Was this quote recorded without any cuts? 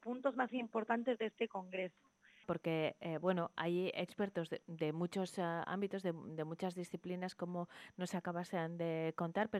no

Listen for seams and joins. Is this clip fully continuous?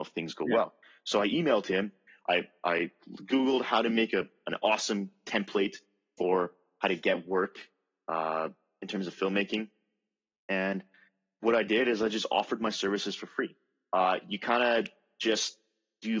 yes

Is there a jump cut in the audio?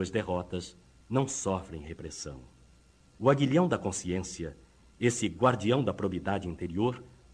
yes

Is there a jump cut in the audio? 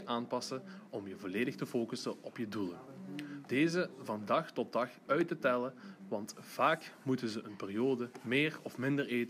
yes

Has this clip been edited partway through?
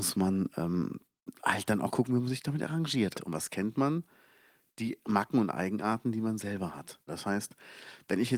yes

